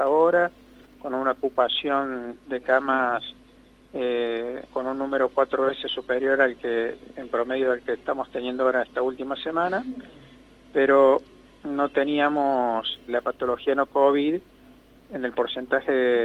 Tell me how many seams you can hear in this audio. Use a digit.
2